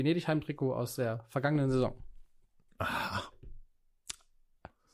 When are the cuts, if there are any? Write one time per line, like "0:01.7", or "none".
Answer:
none